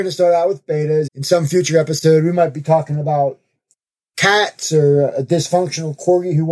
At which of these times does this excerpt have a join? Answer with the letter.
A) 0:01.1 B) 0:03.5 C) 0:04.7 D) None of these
A